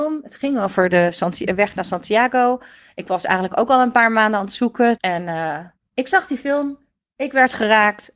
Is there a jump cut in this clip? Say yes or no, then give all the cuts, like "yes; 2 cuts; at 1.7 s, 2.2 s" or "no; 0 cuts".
yes; 1 cut; at 5.0 s